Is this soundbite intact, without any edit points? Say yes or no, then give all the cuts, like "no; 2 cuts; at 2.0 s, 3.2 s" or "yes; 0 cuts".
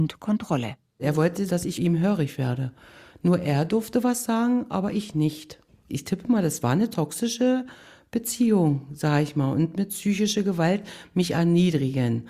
no; 1 cut; at 1.5 s